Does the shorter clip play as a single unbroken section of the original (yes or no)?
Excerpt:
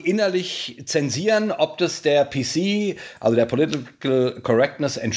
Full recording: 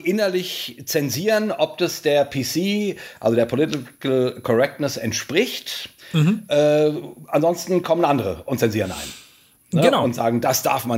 yes